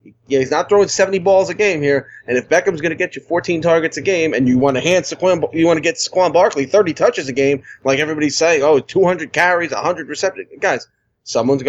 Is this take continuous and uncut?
yes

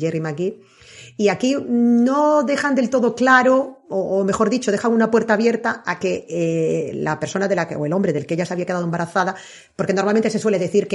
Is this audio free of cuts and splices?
yes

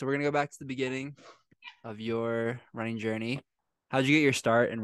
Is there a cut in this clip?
no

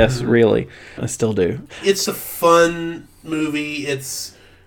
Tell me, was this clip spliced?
yes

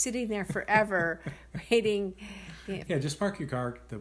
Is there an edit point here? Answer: yes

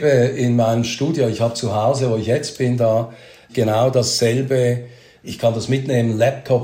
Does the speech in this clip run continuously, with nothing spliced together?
yes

